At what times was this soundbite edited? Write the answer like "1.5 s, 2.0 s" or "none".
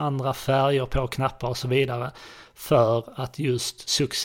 none